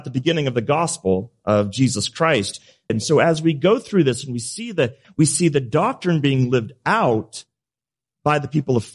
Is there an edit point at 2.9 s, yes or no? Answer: yes